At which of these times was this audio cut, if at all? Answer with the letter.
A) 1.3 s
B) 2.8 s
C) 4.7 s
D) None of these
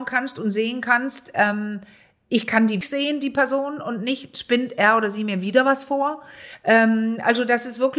B